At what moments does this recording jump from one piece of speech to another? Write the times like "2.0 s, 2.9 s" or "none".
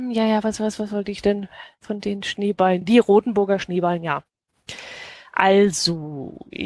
none